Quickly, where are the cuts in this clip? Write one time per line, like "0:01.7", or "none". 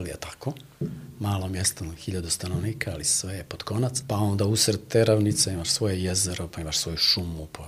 0:04.0